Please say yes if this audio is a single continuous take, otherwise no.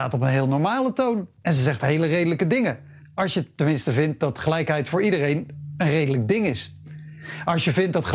yes